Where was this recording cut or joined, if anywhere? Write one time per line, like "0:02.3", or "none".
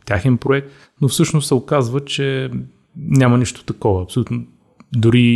none